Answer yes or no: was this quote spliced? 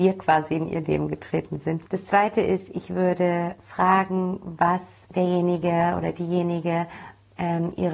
yes